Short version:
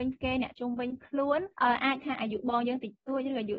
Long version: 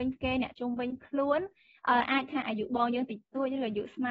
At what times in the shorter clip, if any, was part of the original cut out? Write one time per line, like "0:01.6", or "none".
0:01.5